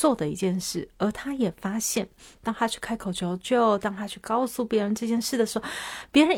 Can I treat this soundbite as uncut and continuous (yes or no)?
yes